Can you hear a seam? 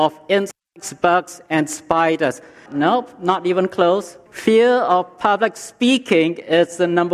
yes; 2 cuts; at 2.7 s, 4.3 s

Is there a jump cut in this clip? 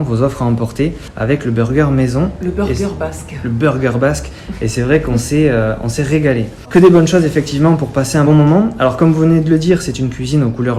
yes; 2 cuts; at 6.6 s, 8.3 s

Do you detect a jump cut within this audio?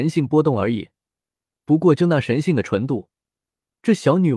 no; 0 cuts

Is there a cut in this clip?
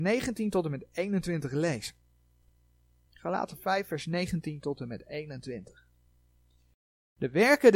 no; 0 cuts

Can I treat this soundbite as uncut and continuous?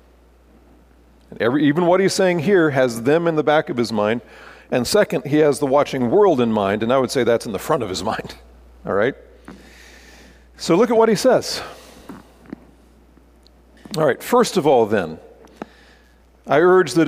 yes; 0 cuts

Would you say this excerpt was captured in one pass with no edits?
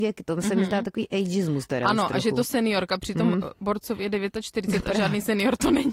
yes; 0 cuts

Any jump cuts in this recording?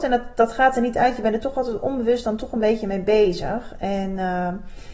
no; 0 cuts

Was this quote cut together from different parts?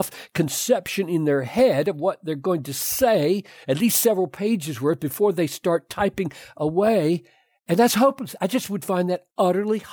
no; 0 cuts

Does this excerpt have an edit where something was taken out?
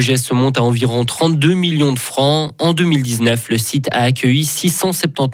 no; 0 cuts

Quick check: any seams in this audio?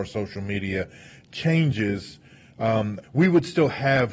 yes; 1 cut; at 3.0 s

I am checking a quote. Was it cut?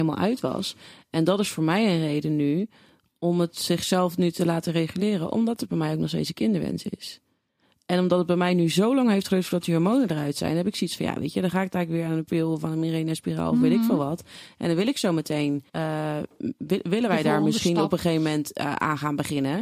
yes; 1 cut; at 15.7 s

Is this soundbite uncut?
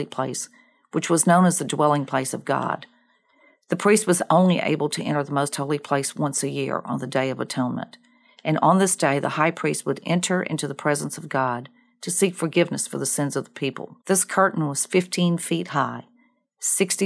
no; 1 cut; at 14.0 s

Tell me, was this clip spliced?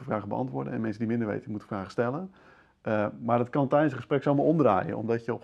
no; 0 cuts

